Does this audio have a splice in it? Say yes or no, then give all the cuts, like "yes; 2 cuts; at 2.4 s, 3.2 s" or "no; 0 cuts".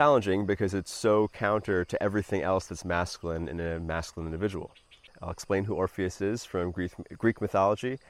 yes; 1 cut; at 5.1 s